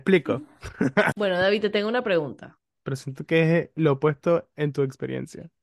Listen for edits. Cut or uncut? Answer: cut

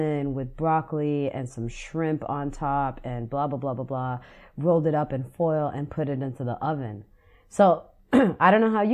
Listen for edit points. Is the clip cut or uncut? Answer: uncut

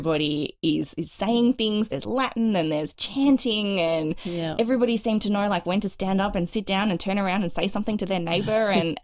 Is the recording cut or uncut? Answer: uncut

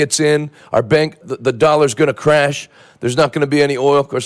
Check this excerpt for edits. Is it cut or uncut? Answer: cut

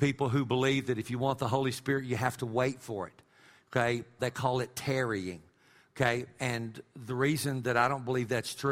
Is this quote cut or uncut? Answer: cut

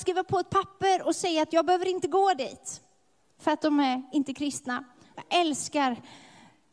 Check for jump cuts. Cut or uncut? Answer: cut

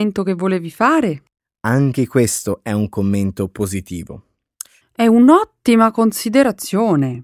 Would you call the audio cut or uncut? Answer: cut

